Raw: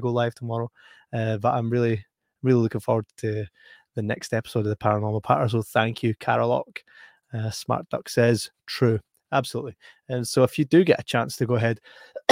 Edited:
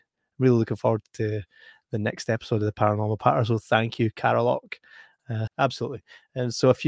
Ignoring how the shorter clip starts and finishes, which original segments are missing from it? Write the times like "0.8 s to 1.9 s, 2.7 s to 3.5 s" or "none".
7.5 s to 9.2 s